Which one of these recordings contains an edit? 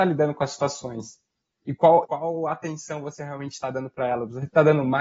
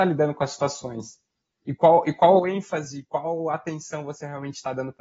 first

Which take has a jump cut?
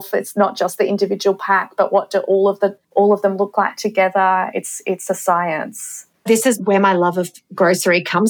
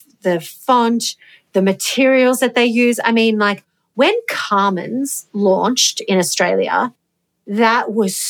first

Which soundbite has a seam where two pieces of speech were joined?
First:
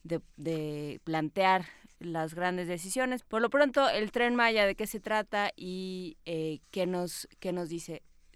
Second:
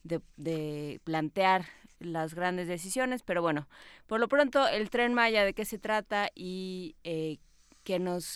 first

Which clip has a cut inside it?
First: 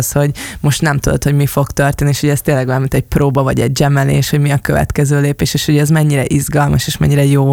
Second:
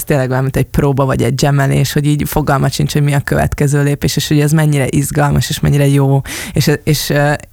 first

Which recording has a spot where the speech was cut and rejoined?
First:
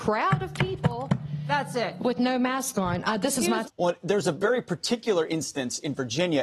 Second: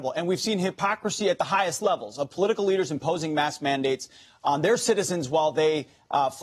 first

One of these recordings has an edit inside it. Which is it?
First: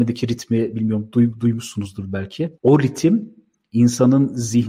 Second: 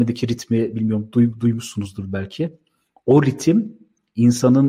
first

